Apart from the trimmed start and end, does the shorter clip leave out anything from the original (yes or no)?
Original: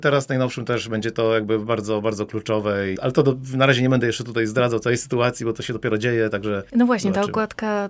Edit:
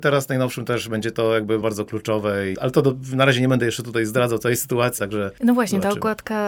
yes